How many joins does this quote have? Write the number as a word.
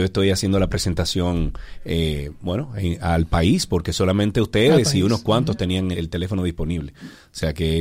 one